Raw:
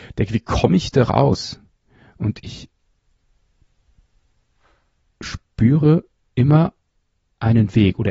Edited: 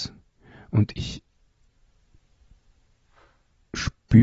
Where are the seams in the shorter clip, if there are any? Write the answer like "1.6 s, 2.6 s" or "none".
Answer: none

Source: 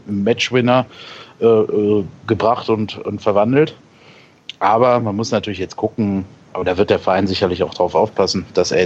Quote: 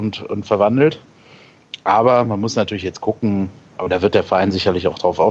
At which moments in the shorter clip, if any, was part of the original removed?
none

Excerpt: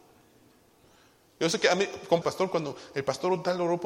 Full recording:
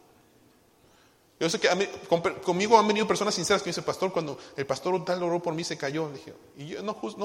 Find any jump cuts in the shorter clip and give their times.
2.2 s

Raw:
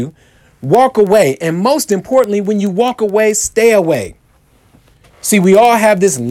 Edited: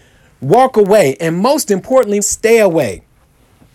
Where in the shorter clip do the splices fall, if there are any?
2.2 s

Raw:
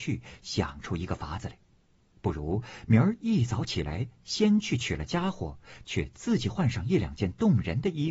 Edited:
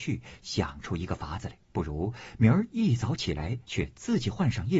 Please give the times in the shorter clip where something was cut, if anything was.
1.7 s, 3.7 s

